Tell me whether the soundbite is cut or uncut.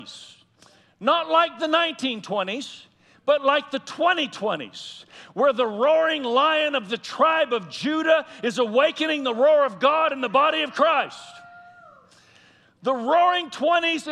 uncut